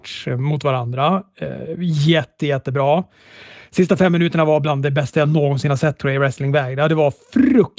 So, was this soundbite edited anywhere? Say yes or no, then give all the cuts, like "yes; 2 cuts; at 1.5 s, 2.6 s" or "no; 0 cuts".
no; 0 cuts